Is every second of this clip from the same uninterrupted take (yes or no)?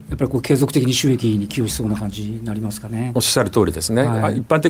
yes